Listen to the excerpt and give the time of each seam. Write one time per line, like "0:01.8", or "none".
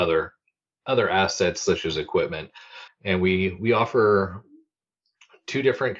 0:02.9